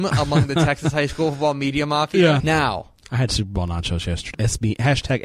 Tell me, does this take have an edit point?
yes; 2 cuts; at 2.4 s, 4.3 s

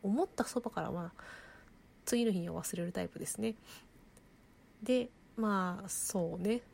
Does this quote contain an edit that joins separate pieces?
no; 0 cuts

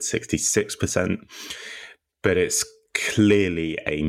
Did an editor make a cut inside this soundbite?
no; 0 cuts

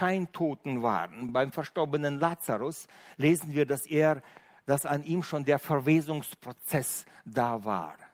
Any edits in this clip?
no; 0 cuts

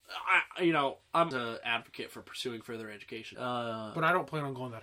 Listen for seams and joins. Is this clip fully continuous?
no; 2 cuts; at 1.3 s, 3.3 s

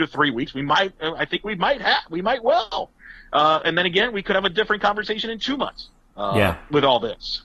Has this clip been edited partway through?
no; 0 cuts

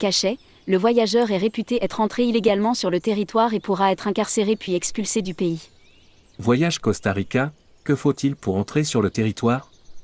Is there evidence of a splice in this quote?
yes; 1 cut; at 6.3 s

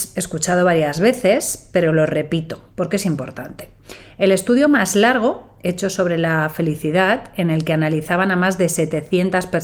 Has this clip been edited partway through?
no; 0 cuts

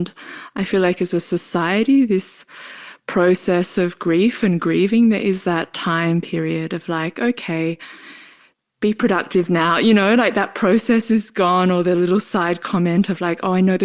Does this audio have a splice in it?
no; 0 cuts

